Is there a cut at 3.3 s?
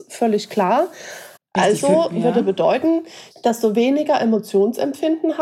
yes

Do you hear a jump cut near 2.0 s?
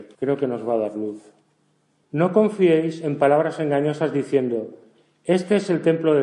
yes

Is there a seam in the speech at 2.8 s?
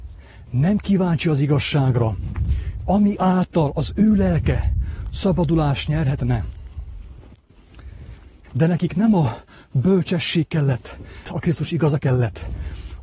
no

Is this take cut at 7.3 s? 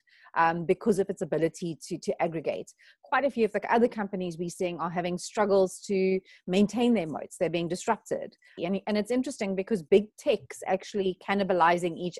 no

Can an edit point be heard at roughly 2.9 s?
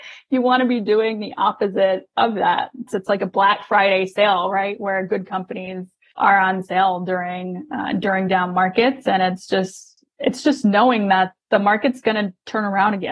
yes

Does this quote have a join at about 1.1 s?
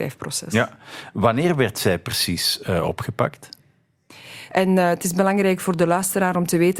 no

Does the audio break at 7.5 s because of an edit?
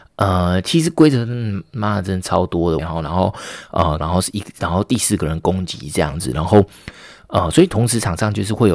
no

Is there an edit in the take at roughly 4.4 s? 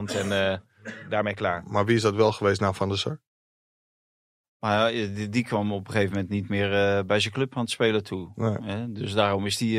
yes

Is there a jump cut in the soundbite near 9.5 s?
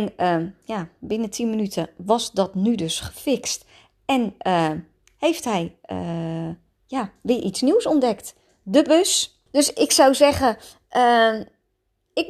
yes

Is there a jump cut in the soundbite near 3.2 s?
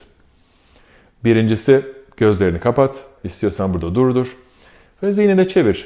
yes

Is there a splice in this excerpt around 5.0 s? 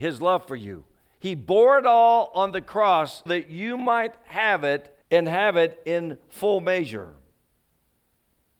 yes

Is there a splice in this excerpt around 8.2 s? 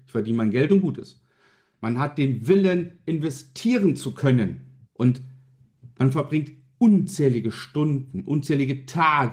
no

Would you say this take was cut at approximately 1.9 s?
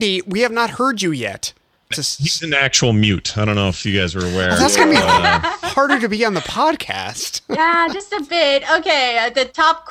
yes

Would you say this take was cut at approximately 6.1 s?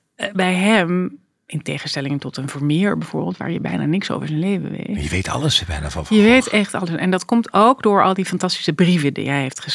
no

